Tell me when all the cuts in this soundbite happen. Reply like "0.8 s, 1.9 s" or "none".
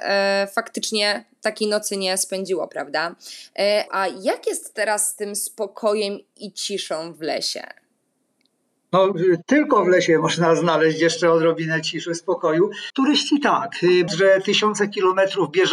3.9 s, 12.9 s, 14.1 s